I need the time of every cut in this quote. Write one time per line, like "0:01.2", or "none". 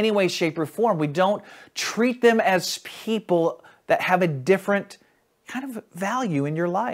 none

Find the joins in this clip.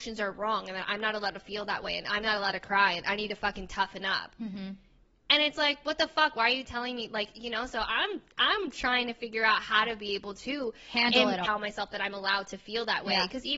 0:11.4

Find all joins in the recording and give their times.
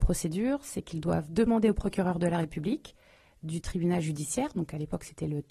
none

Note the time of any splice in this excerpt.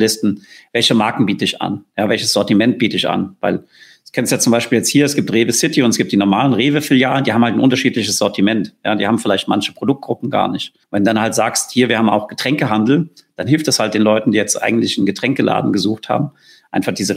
0:10.8

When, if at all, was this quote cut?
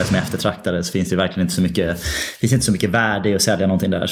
none

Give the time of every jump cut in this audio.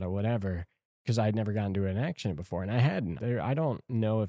0:03.2

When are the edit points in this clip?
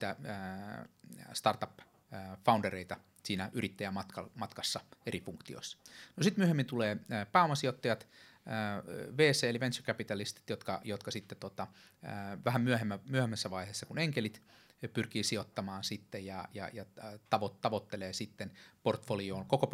none

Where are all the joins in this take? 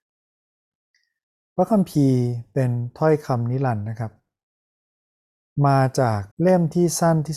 0:06.3

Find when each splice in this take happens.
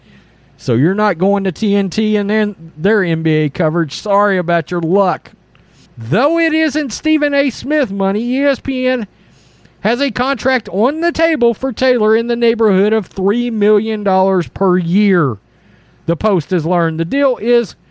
0:05.9

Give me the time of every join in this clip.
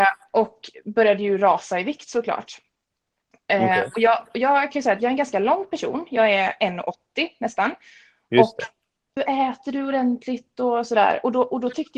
0:09.2

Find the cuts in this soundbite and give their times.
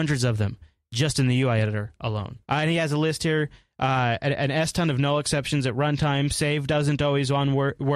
0:02.4

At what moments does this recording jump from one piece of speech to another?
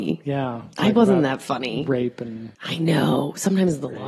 0:02.5

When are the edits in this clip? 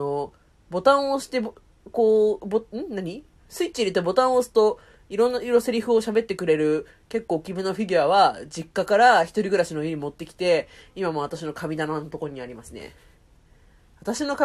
none

